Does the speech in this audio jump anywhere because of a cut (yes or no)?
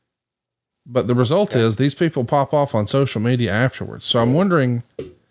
no